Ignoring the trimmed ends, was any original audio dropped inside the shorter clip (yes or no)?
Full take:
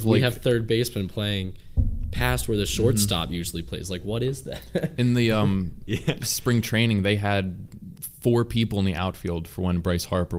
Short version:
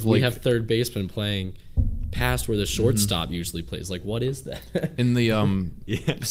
no